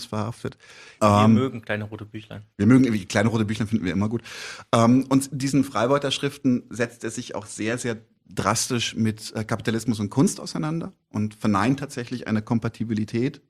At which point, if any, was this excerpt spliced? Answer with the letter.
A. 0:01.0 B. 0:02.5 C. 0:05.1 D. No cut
A